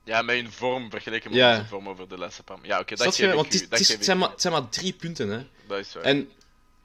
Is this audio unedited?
no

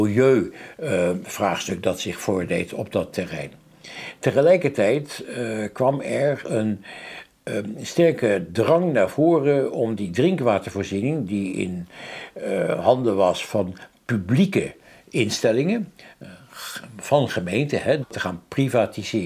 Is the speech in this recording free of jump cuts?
yes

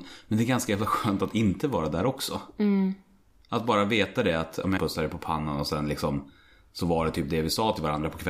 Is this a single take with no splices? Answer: no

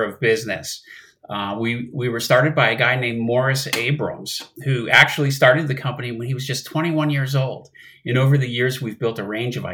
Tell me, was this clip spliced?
no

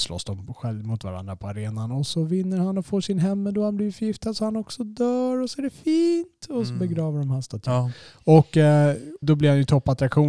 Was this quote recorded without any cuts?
no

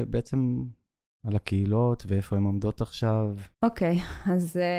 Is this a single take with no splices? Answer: no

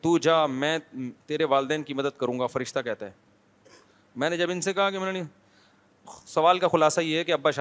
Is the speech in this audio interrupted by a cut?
yes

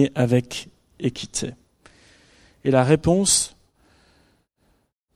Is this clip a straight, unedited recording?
yes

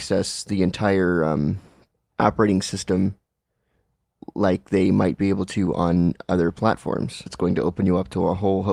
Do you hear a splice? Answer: yes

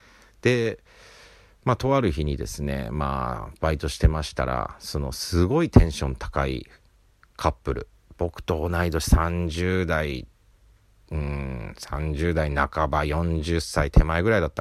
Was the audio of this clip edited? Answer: no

